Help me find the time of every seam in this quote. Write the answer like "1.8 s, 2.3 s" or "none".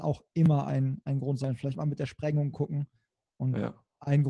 3.2 s